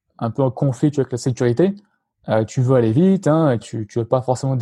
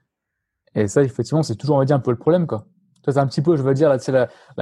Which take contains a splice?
first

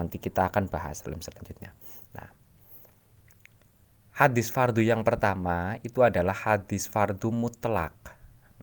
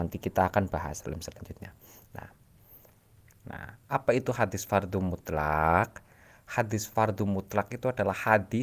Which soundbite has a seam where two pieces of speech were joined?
second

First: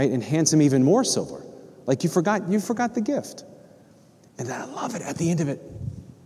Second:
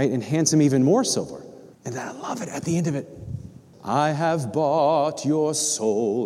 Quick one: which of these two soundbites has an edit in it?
second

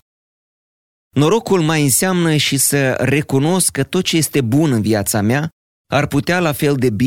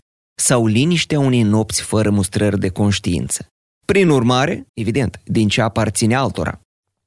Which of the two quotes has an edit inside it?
second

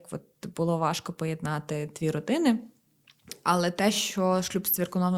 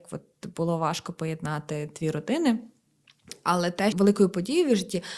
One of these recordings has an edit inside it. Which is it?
second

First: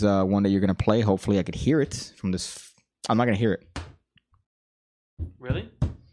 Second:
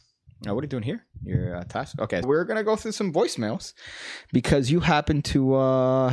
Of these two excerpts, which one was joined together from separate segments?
second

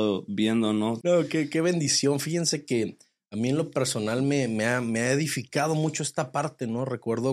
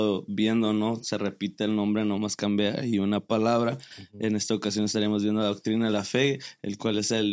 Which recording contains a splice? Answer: first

